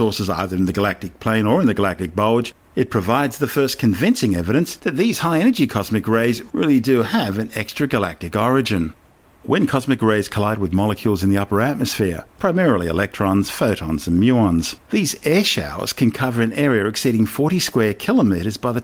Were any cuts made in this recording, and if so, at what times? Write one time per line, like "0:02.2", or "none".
0:12.3
0:14.8